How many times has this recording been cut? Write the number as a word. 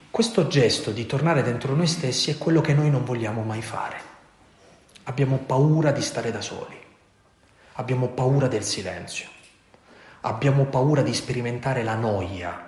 one